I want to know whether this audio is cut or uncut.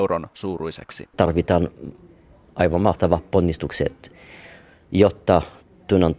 cut